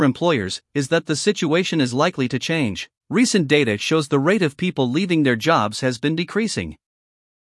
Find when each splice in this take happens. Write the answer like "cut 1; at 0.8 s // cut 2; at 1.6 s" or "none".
cut 1; at 3.0 s